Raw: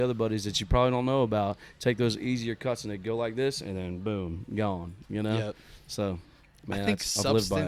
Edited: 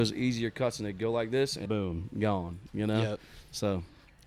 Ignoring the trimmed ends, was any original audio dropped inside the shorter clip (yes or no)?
yes